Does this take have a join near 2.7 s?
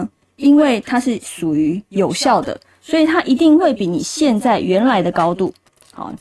no; 0 cuts

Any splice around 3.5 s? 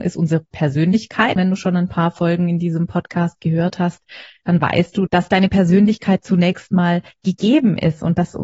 no; 2 cuts; at 1.4 s, 5.1 s

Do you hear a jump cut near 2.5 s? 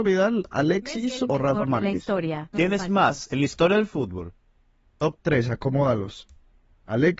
yes; 1 cut; at 2.5 s

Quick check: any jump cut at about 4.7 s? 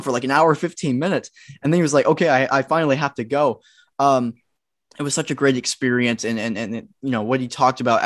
no; 0 cuts

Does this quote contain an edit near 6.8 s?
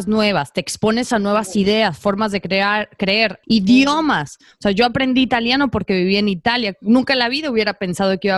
no; 1 cut; at 3.4 s

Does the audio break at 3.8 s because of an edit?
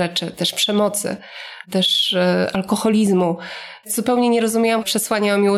yes; 1 cut; at 3.8 s

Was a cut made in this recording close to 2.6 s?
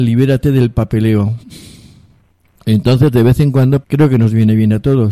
yes; 2 cuts; at 2.6 s, 3.8 s

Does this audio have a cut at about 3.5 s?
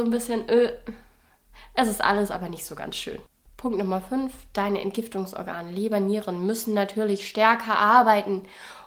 yes; 1 cut; at 3.5 s

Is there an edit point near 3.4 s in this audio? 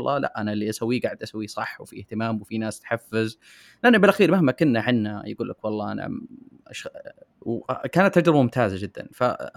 no; 1 cut; at 7.3 s

